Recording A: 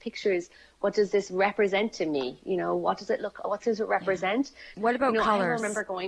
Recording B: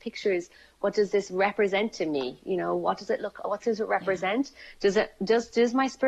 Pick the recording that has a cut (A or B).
A